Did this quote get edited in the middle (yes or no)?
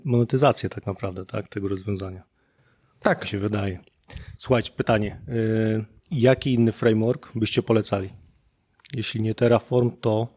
yes